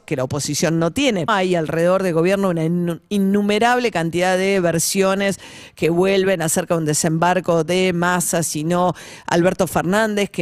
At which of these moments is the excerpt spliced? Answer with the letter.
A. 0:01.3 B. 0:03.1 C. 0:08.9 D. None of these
A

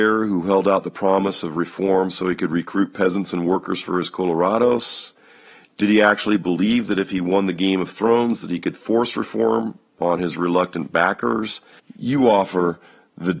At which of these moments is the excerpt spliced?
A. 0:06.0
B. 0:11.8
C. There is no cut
B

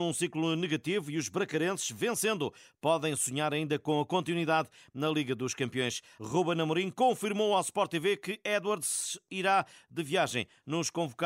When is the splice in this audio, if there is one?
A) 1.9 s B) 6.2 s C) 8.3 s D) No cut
B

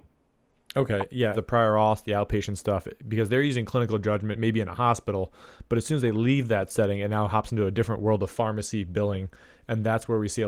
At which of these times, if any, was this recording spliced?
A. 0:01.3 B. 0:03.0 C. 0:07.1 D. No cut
A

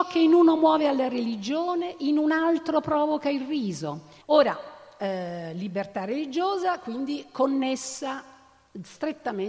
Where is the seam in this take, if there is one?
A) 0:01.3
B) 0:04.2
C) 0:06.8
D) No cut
B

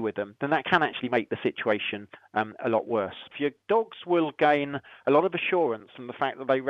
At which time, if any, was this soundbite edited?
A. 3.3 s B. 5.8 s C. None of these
A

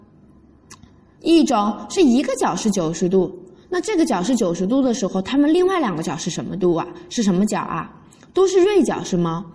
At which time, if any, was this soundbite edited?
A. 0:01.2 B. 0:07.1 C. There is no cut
A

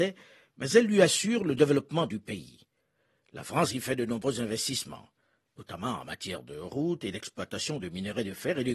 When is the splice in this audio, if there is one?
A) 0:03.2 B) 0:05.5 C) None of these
C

